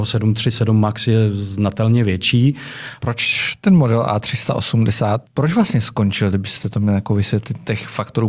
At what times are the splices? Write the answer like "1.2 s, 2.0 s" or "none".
3.0 s, 5.2 s